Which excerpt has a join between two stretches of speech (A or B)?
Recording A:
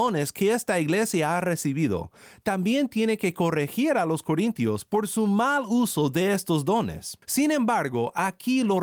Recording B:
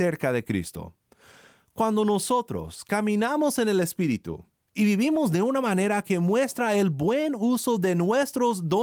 A